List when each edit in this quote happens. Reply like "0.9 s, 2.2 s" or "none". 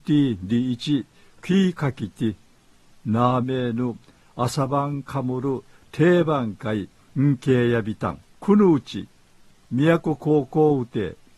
3.4 s, 8.3 s